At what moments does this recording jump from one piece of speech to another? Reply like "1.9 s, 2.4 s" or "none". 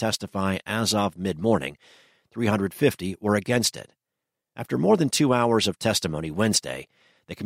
none